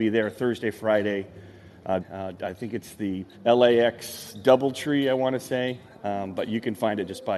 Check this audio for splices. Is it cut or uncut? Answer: cut